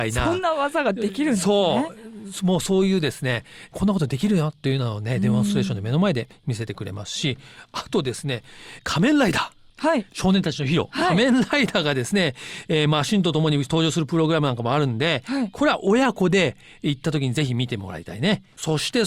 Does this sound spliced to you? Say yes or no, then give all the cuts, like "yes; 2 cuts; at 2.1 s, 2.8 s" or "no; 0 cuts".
no; 0 cuts